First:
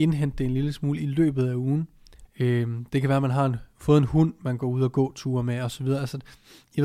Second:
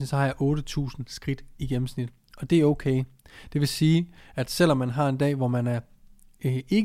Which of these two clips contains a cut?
first; 1 cut; at 2.2 s

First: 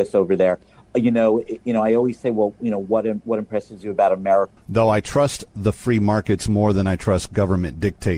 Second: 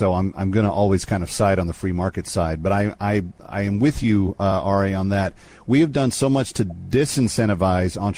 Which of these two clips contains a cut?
first; 1 cut; at 4.6 s

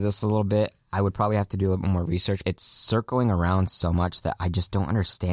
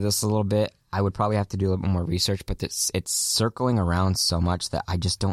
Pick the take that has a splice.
first; 1 cut; at 2.4 s

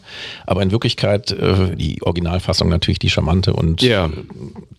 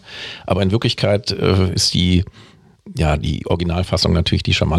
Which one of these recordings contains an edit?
first; 1 cut; at 1.7 s

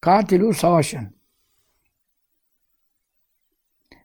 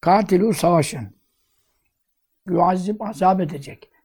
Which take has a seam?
second; 1 cut; at 2.5 s

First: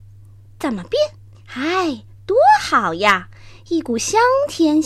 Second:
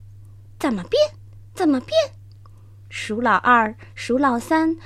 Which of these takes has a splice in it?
first; 1 cut; at 1.3 s

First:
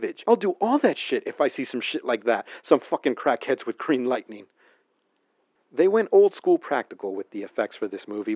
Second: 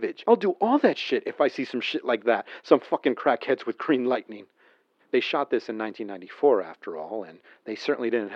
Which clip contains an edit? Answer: second; 1 cut; at 5.0 s

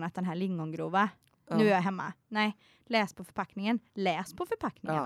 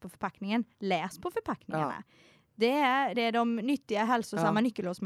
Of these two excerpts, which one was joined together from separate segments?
second; 1 cut; at 3.1 s

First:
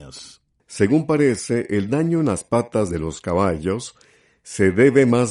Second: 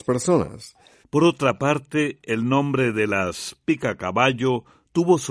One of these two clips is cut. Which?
second; 1 cut; at 1.0 s

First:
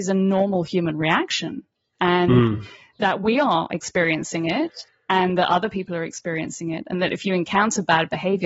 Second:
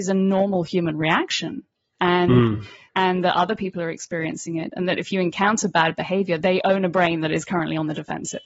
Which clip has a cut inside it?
second; 2 cuts; at 2.9 s, 6.4 s

